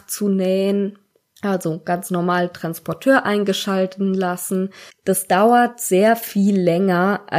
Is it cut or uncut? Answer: cut